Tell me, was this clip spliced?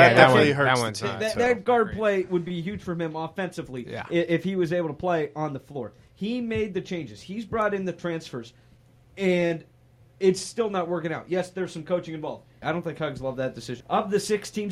yes; 2 cuts; at 12.6 s, 13.8 s

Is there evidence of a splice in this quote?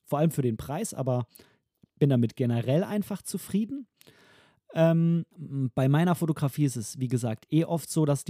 yes; 1 cut; at 5.3 s

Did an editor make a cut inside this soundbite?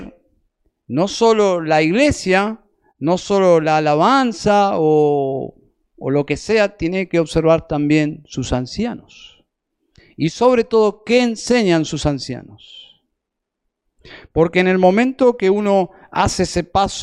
no; 0 cuts

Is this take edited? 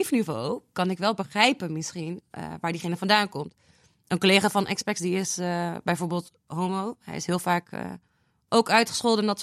no; 0 cuts

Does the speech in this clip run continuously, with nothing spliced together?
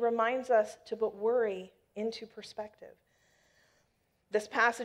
yes; 0 cuts

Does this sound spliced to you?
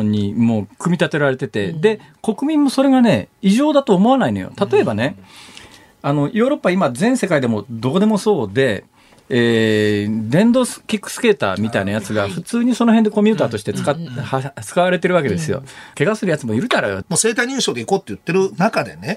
yes; 2 cuts; at 15.9 s, 17.0 s

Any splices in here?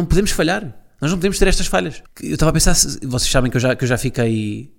yes; 1 cut; at 2.1 s

